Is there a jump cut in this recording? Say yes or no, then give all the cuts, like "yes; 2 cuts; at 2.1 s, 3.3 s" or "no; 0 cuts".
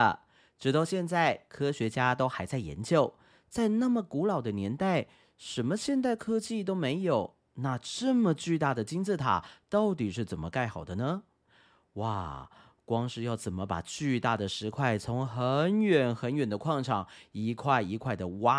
no; 0 cuts